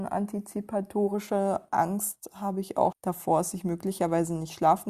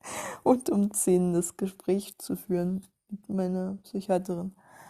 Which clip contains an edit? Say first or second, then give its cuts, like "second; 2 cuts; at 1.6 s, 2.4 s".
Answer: first; 1 cut; at 2.9 s